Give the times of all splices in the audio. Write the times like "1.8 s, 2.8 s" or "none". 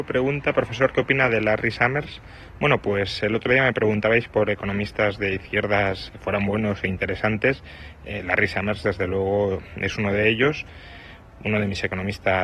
6.1 s